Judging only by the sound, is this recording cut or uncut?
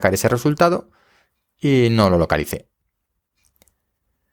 uncut